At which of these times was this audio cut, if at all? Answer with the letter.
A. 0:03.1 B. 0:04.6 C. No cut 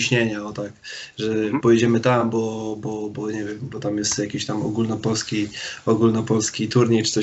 C